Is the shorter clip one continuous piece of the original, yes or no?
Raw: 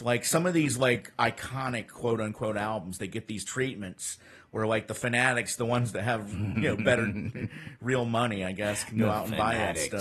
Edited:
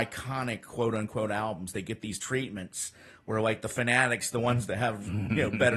yes